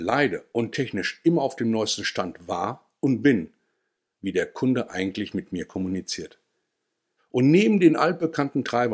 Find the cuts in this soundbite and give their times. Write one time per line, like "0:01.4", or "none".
0:04.1
0:07.2